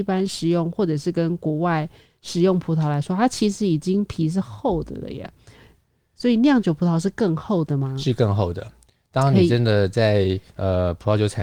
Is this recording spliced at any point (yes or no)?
no